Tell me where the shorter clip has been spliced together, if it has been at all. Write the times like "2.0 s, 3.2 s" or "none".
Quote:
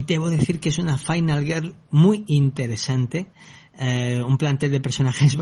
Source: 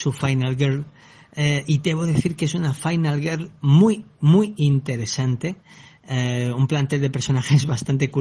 1.8 s